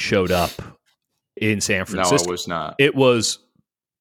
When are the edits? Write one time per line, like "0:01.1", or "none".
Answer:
0:01.4